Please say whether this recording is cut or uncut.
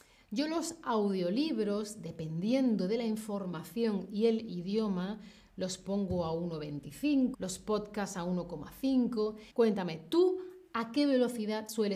cut